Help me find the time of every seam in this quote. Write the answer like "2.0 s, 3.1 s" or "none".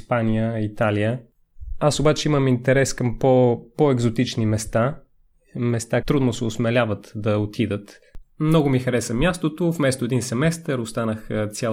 6.0 s, 8.2 s